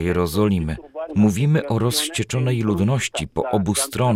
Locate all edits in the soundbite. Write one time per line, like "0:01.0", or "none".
0:01.1